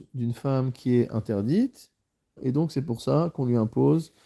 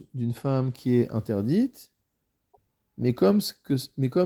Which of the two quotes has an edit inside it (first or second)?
first